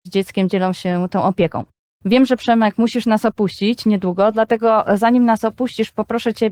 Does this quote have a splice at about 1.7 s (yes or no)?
no